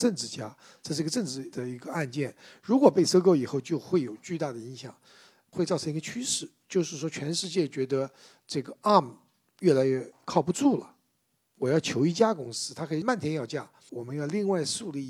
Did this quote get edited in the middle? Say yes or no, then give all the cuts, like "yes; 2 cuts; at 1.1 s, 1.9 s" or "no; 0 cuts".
yes; 1 cut; at 13.9 s